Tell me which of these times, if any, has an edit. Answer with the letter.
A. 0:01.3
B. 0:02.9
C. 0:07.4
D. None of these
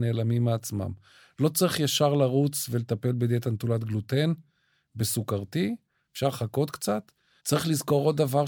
C